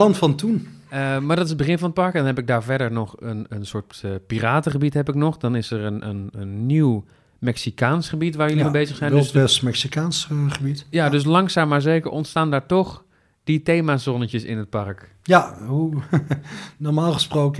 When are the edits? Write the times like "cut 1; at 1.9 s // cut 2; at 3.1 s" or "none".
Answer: none